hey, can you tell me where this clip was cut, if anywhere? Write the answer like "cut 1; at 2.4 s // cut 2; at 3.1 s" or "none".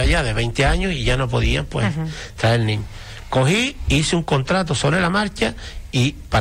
none